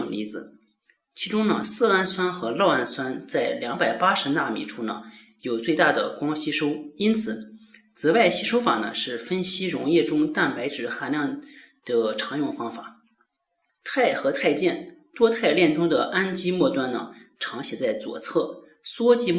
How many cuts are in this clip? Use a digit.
1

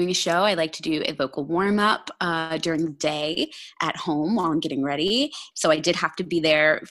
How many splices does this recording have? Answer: 1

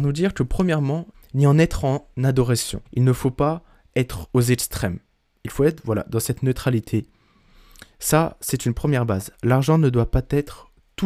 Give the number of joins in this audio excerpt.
2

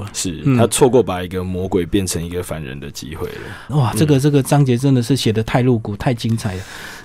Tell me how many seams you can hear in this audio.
1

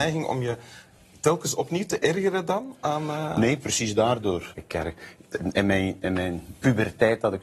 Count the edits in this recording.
1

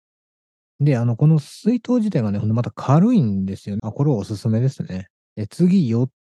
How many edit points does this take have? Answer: 2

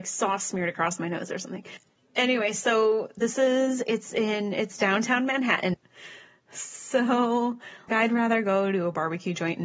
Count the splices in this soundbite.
2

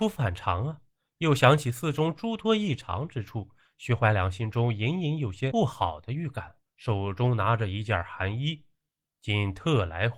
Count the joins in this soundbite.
2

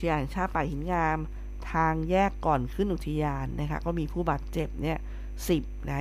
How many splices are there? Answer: 0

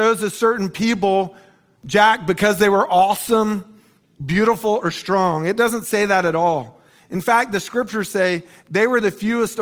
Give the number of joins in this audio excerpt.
1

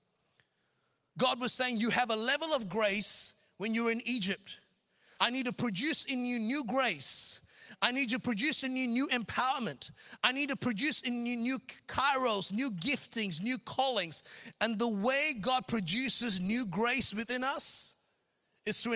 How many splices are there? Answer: 1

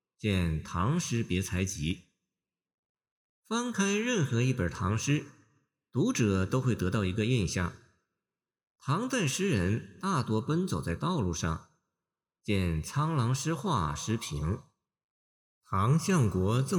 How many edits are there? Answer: 1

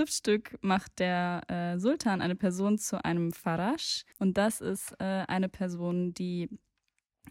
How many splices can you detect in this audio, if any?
1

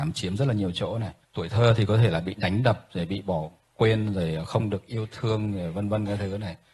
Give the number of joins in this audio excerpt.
1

